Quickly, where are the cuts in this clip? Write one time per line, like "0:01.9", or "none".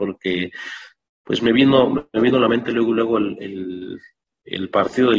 none